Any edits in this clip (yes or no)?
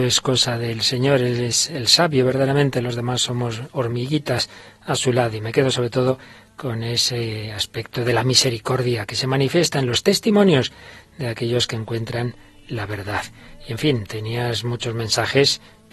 no